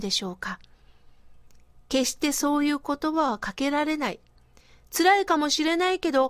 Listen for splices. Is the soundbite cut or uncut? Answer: uncut